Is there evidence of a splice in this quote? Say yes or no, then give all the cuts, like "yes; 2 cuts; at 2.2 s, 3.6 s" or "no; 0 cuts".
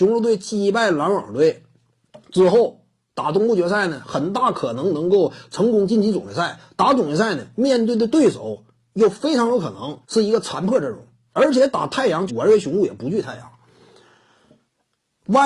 yes; 2 cuts; at 10.0 s, 12.3 s